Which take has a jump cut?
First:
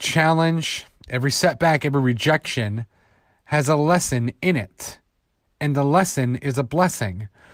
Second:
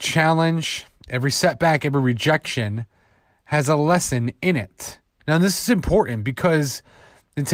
second; 1 cut; at 5.2 s

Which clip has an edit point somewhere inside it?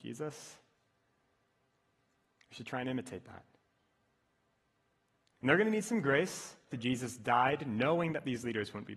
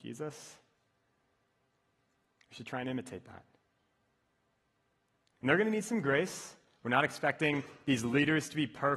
first; 1 cut; at 6.7 s

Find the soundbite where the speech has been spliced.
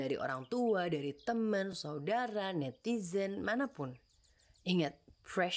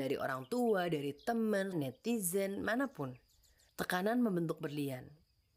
second; 2 cuts; at 1.7 s, 3.7 s

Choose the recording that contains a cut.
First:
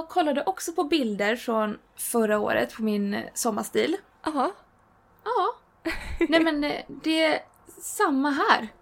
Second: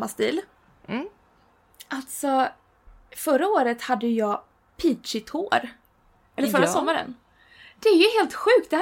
first; 1 cut; at 4.1 s

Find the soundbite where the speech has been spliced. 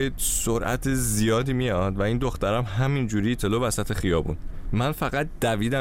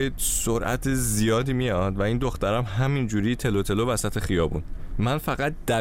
first; 1 cut; at 3.4 s

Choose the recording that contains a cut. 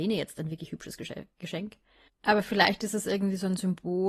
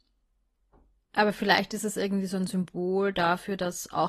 first; 1 cut; at 2.1 s

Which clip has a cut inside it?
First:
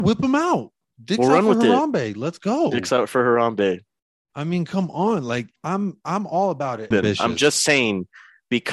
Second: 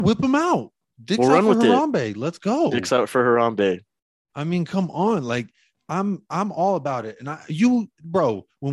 first; 2 cuts; at 5.6 s, 6.9 s

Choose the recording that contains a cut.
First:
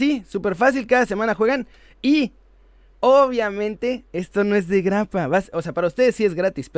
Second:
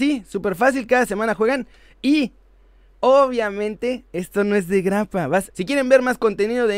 second; 1 cut; at 5.5 s

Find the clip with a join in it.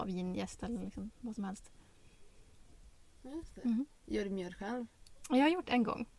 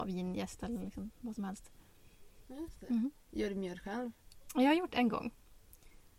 second; 1 cut; at 2.4 s

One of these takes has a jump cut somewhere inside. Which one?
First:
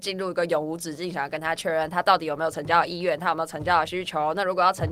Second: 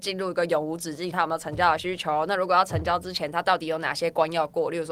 second; 1 cut; at 1.1 s

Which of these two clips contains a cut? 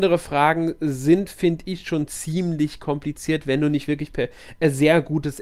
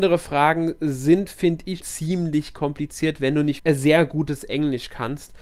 second; 2 cuts; at 1.8 s, 3.6 s

